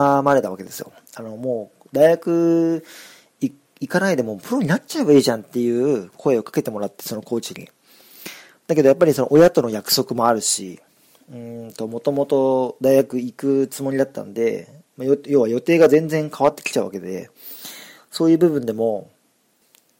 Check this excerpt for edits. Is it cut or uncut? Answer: uncut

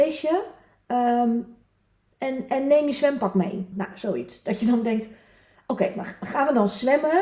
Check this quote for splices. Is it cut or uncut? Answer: cut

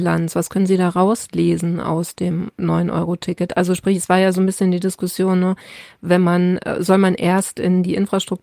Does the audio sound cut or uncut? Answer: uncut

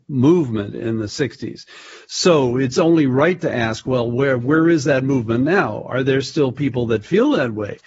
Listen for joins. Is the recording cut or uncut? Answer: uncut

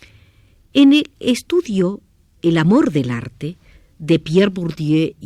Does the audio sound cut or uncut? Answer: uncut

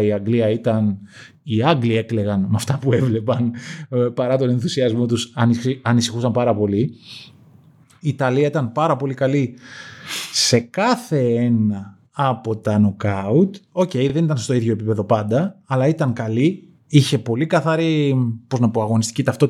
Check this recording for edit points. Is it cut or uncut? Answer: uncut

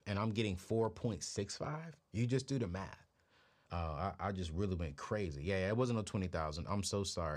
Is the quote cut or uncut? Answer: cut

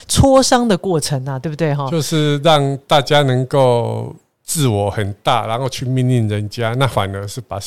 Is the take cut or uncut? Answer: cut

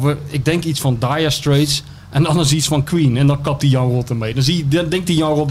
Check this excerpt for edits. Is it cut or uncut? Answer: uncut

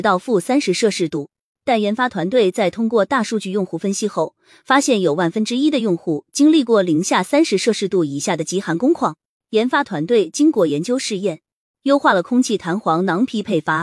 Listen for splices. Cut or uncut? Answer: uncut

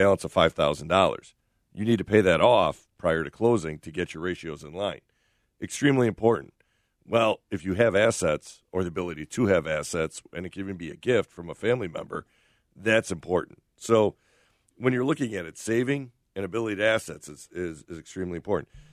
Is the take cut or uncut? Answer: uncut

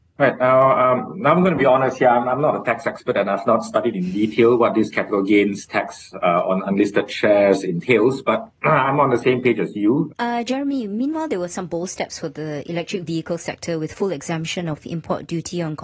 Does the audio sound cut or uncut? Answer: cut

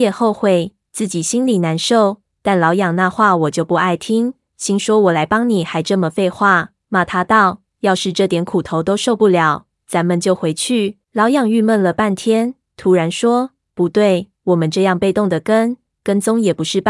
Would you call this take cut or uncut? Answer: cut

